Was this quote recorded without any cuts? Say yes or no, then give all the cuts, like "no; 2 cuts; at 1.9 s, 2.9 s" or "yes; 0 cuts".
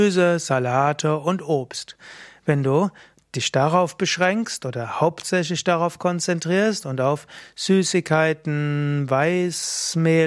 yes; 0 cuts